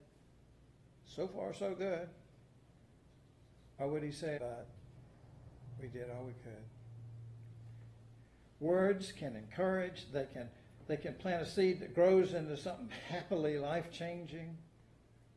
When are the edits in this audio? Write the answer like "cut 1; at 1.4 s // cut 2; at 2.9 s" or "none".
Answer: cut 1; at 4.4 s